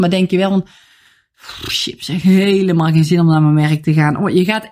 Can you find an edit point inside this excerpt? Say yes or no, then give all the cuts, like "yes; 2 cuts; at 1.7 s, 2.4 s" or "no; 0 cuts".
no; 0 cuts